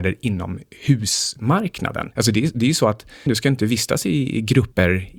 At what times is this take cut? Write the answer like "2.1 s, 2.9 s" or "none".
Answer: 3.3 s